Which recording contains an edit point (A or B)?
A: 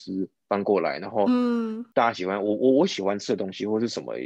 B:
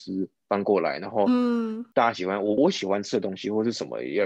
B